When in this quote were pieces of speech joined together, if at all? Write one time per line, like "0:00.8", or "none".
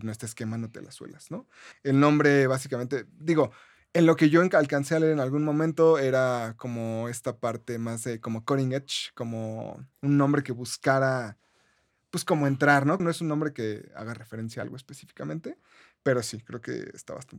0:01.7
0:13.0

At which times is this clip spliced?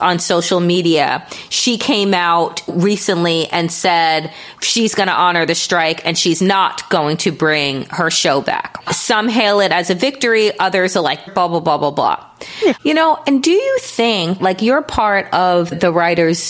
0:11.3
0:12.8

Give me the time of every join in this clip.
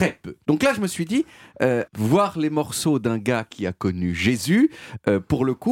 0:01.9

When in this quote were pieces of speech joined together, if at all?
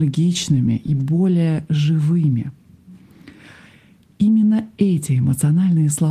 none

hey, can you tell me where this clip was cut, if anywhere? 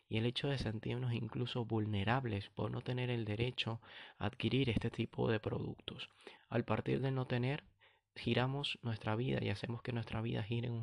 0:06.4

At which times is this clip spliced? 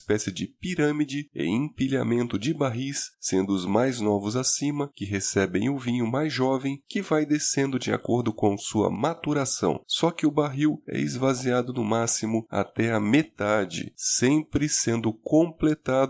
0:09.8

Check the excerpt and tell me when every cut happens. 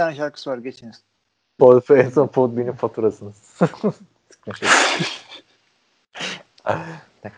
0:01.6

